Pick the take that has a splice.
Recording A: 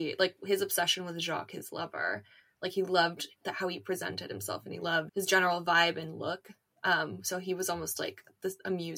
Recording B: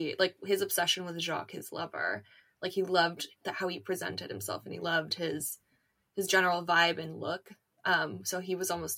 A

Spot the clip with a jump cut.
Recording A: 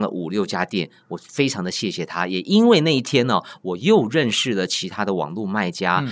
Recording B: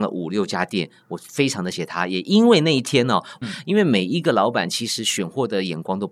B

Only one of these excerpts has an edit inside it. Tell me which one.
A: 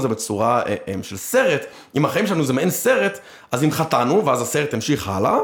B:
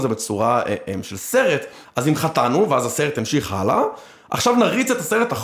B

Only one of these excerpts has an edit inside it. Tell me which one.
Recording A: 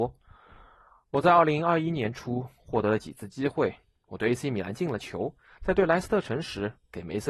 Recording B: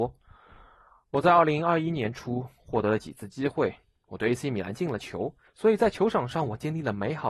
B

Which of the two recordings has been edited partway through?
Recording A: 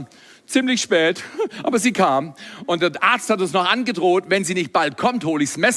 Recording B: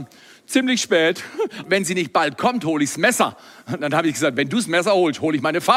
B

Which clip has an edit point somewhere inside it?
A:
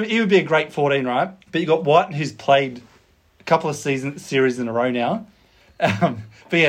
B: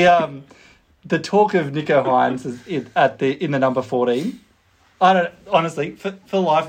A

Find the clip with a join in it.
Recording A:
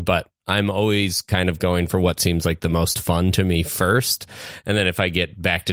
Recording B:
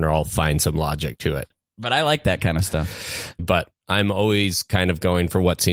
B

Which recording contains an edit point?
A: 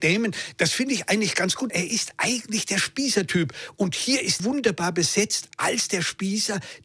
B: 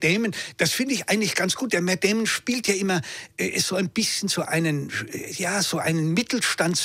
A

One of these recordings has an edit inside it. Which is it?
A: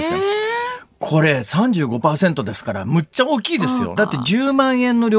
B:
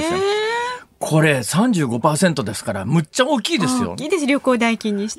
A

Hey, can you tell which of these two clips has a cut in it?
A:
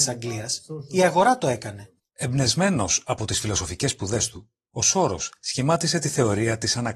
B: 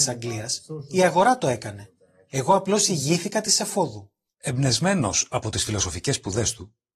A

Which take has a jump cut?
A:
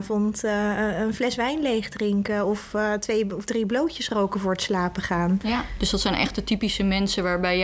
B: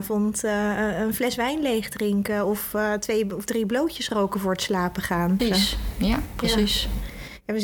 B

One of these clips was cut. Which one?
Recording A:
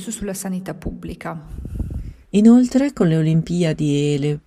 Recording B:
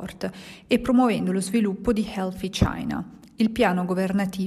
A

